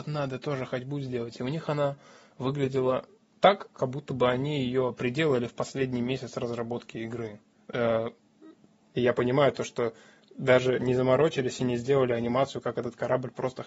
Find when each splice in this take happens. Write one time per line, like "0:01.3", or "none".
0:08.9

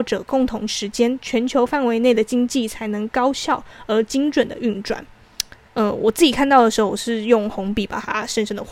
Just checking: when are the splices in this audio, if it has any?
0:05.7

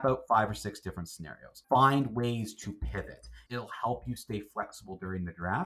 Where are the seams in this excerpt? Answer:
0:01.6
0:03.5

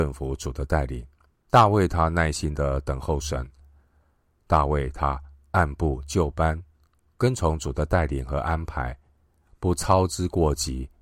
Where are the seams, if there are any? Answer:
0:01.3

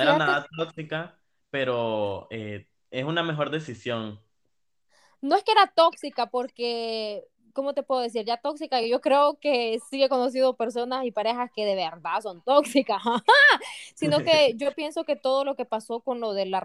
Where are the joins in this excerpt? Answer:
none

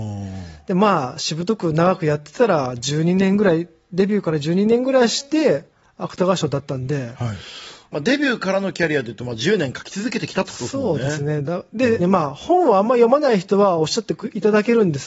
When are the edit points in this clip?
0:07.9
0:12.0

